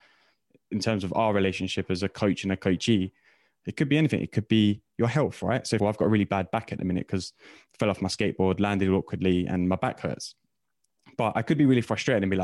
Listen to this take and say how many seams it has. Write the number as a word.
one